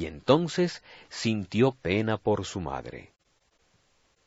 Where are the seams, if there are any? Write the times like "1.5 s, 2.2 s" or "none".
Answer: none